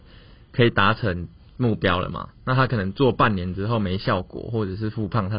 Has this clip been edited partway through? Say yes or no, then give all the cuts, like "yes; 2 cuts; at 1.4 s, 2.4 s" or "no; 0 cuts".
no; 0 cuts